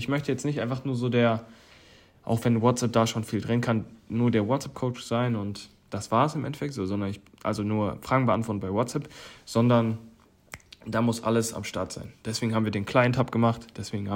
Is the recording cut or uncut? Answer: uncut